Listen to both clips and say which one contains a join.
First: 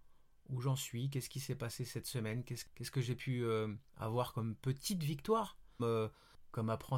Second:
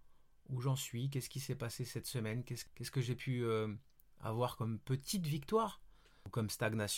first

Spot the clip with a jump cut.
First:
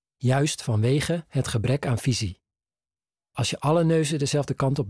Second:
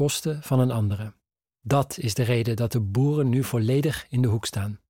second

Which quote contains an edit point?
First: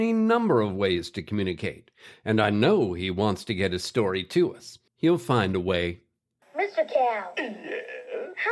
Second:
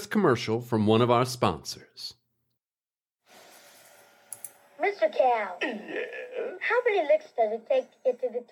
first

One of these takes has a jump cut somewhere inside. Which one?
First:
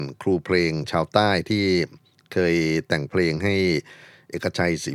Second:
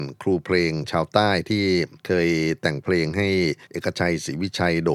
second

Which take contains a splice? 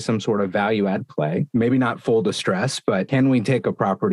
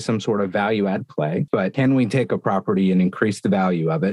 second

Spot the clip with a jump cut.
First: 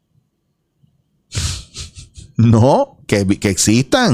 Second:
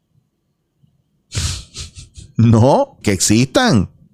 second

